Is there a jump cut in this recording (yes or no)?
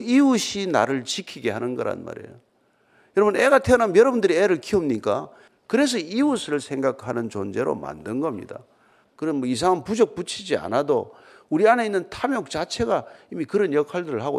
yes